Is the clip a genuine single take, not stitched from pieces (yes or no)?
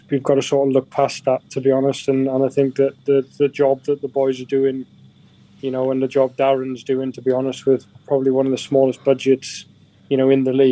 yes